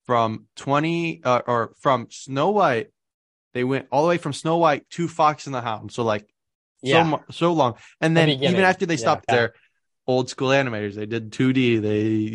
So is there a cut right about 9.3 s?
yes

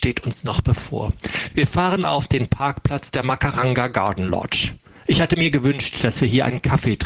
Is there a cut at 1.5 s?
no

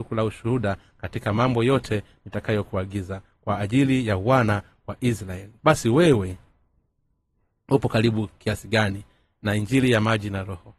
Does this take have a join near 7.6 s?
no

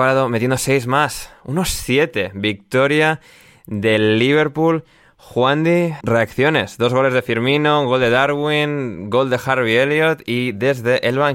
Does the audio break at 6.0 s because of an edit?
yes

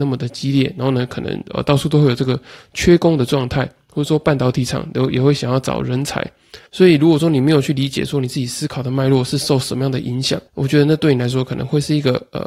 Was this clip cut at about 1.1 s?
no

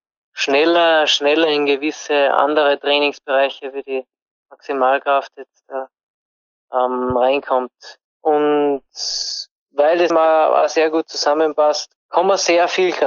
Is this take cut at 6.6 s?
no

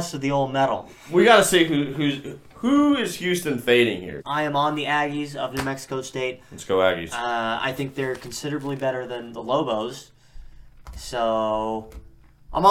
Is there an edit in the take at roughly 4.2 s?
yes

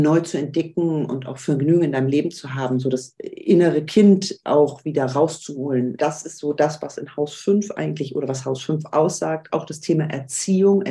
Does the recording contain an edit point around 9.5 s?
no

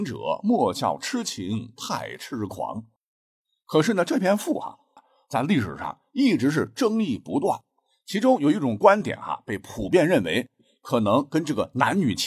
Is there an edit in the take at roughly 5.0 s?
yes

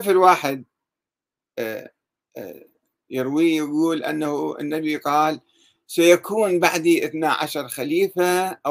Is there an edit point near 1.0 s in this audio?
no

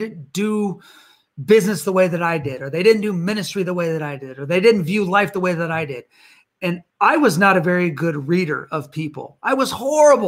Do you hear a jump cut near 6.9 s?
yes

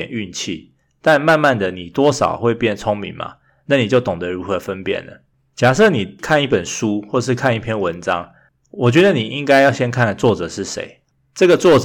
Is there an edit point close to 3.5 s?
no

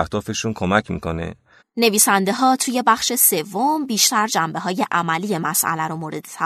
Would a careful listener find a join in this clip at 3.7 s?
no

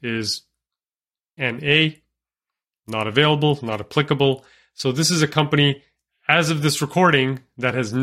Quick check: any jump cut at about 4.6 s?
no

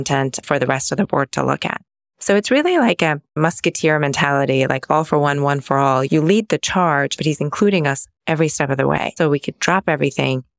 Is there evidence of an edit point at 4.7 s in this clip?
no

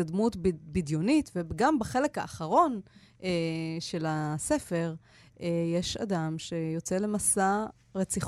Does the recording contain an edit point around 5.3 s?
no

